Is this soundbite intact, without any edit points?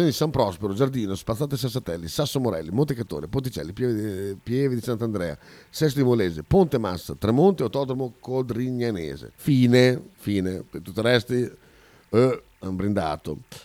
no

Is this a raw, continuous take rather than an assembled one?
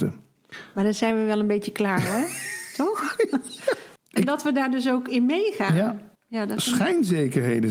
no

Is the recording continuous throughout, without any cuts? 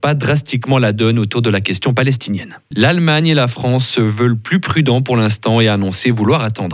no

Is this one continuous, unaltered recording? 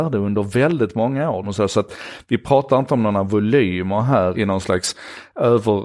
no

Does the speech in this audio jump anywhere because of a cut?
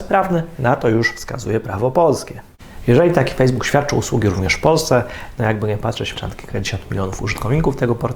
yes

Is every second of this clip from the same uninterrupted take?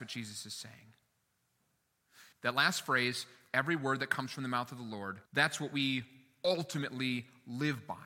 no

